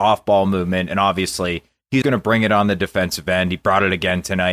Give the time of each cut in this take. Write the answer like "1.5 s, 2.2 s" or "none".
2.0 s